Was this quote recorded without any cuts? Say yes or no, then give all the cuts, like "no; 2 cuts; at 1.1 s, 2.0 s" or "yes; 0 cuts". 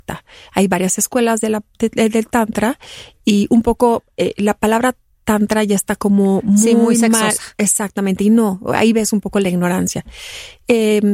yes; 0 cuts